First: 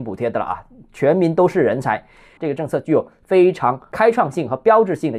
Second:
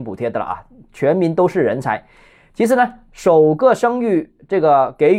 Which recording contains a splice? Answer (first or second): first